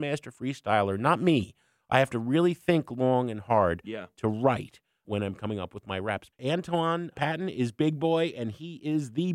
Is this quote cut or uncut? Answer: cut